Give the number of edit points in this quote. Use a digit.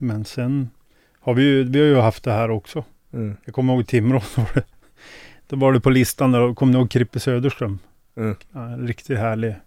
1